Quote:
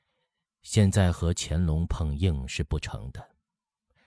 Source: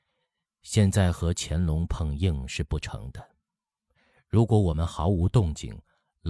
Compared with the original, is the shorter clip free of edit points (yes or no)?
yes